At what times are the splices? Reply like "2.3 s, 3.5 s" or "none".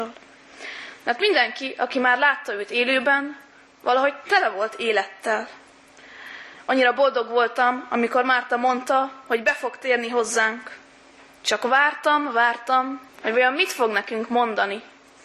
11.4 s, 13.1 s